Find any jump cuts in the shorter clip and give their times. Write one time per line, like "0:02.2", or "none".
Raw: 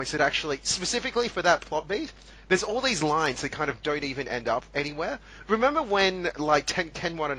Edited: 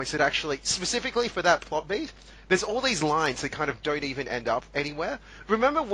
none